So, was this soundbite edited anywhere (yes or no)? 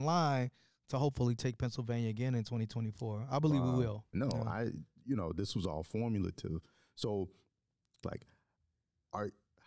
yes